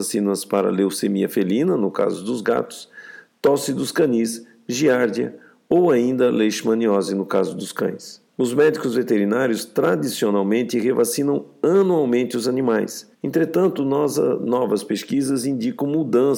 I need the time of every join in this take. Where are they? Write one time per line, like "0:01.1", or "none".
0:08.3
0:13.1